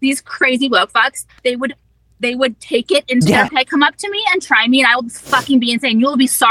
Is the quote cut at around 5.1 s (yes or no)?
no